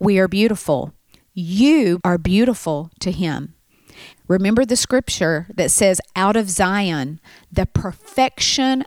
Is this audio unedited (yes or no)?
no